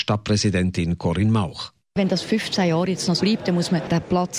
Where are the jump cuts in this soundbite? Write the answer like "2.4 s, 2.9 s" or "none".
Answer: 3.2 s